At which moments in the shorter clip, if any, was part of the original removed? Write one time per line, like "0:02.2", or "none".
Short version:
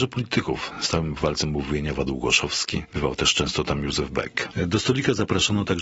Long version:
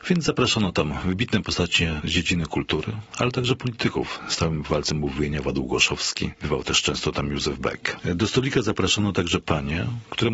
none